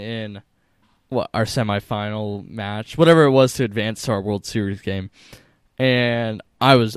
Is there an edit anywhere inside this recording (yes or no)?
no